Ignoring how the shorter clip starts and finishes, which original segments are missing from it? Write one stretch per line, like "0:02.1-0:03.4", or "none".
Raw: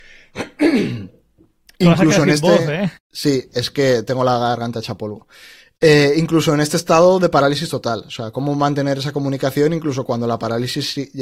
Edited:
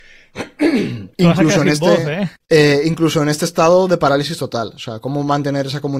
0:01.1-0:01.7
0:03.0-0:05.7